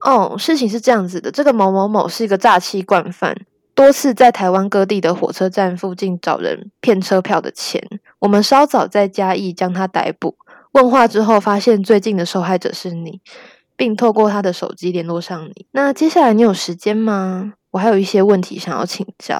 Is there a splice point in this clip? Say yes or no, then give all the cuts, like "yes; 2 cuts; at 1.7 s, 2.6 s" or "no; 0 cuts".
no; 0 cuts